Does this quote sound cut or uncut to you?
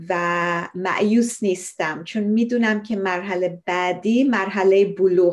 uncut